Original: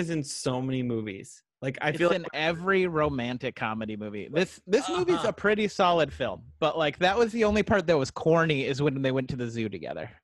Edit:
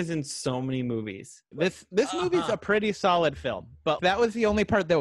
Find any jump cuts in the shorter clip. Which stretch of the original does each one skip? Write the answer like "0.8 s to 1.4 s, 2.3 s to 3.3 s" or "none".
1.5 s to 4.3 s, 6.7 s to 7.0 s